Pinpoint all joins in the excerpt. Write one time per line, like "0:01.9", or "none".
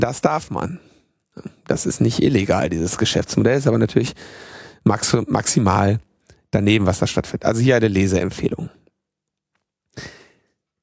none